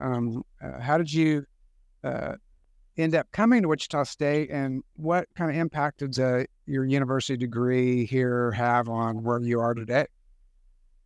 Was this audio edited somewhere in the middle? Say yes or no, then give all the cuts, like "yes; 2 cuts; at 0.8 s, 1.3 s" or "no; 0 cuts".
no; 0 cuts